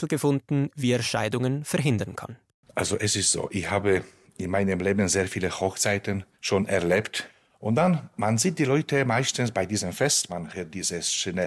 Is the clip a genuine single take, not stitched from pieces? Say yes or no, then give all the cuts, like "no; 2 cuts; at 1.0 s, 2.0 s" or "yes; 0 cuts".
no; 2 cuts; at 6.3 s, 10.3 s